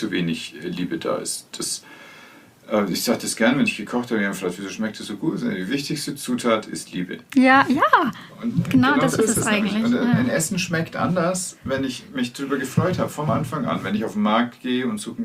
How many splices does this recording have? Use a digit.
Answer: 0